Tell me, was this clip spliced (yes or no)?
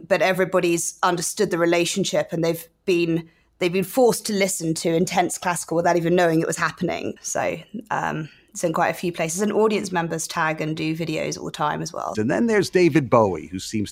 yes